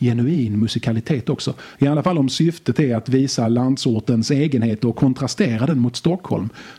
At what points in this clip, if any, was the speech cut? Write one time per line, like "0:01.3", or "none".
0:01.7